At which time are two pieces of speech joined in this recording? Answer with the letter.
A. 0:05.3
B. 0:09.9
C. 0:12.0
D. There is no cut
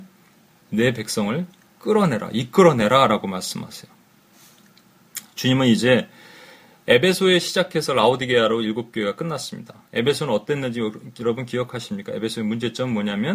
D